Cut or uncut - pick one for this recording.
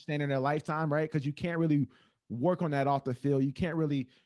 uncut